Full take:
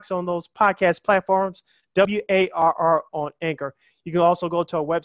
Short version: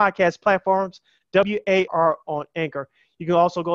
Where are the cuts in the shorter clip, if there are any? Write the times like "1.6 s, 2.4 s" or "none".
1.9 s